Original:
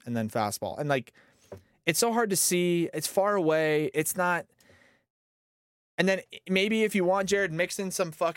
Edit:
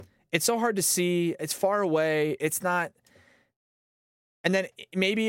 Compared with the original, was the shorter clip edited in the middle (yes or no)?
no